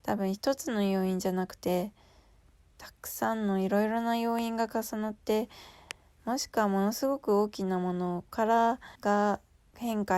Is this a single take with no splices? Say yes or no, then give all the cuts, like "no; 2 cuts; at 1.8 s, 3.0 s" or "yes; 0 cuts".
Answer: no; 1 cut; at 9.0 s